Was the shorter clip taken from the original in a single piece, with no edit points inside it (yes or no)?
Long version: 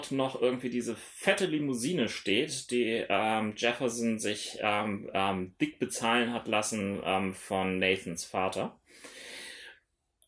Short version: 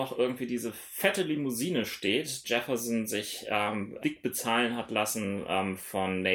no